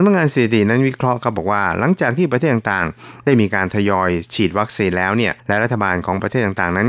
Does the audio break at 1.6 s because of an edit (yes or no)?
no